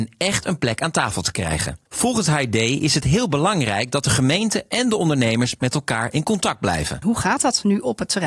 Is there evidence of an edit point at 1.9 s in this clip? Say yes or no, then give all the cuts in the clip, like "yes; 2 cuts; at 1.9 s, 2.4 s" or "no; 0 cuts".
yes; 2 cuts; at 1.9 s, 7.0 s